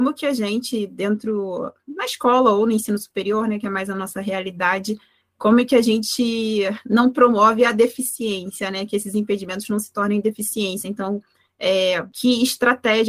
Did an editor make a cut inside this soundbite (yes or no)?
no